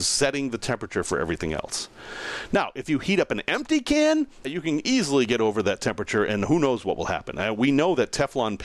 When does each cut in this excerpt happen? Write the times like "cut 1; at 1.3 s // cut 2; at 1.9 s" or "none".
cut 1; at 4.4 s